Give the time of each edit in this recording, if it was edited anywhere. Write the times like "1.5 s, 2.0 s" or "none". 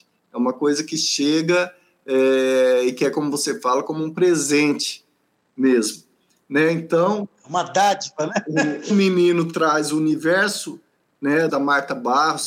8.9 s, 11.5 s